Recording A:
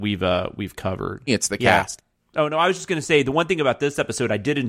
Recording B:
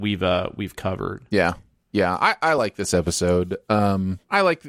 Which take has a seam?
A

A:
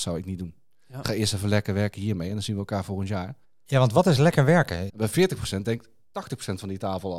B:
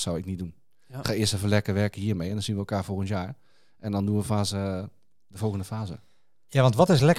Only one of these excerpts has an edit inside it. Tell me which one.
A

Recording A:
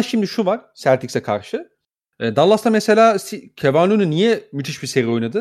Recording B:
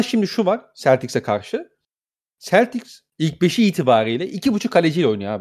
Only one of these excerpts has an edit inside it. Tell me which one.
A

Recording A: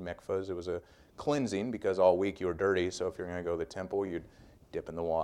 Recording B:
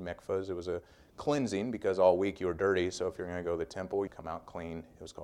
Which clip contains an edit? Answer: B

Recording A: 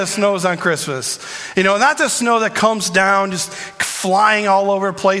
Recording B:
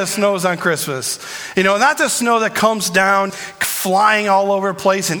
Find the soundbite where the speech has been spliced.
B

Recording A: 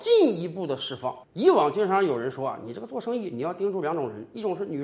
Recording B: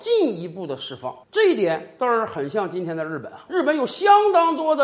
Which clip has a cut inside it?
B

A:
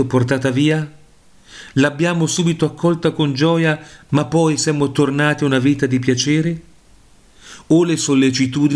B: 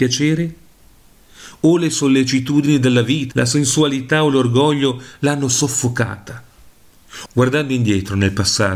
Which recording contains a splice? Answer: B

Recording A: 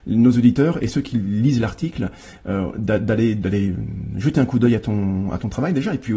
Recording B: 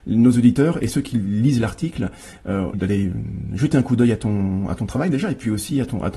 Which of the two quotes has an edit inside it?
B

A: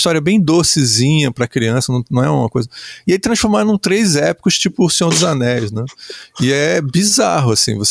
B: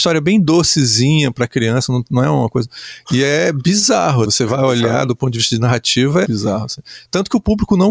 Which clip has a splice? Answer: B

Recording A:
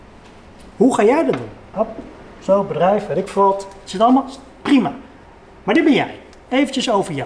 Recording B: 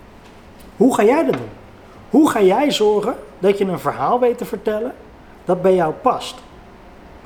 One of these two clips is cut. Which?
A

